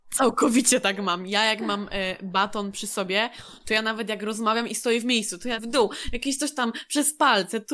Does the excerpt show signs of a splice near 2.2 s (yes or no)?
no